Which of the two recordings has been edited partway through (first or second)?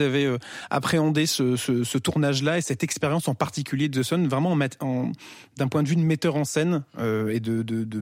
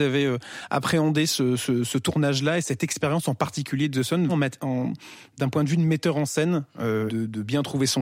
second